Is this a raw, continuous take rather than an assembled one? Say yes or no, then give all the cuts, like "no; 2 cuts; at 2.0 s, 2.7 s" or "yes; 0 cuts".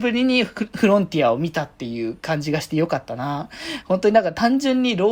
yes; 0 cuts